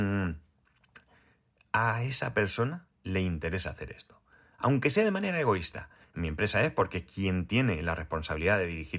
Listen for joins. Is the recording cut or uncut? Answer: cut